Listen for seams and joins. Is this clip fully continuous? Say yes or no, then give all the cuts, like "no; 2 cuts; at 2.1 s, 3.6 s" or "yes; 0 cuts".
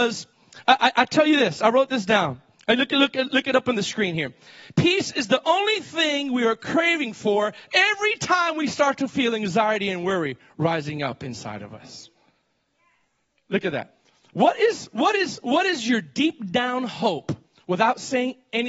yes; 0 cuts